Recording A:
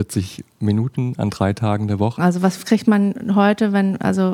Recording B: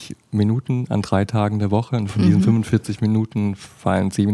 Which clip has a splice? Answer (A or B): A